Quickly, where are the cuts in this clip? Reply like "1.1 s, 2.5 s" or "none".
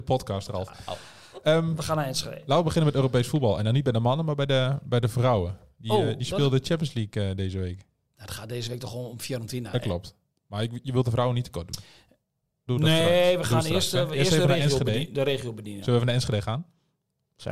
9.7 s, 12.7 s